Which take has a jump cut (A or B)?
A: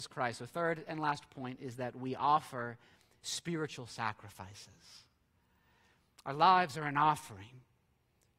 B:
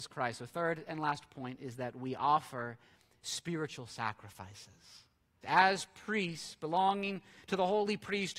B